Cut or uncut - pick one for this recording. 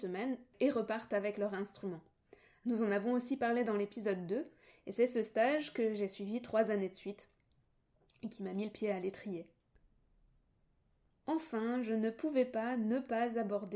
uncut